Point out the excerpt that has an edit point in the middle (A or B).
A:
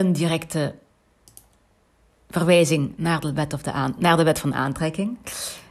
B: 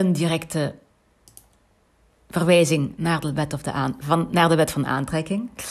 A